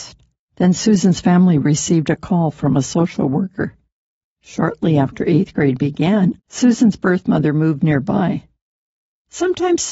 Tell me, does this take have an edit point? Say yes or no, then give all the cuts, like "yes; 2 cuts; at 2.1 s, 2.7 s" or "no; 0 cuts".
yes; 2 cuts; at 4.2 s, 6.4 s